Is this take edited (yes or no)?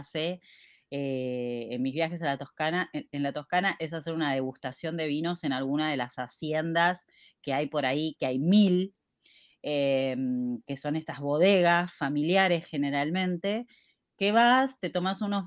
no